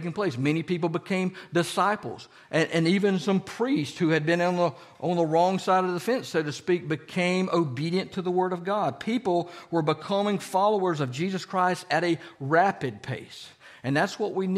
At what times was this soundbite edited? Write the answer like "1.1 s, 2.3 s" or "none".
none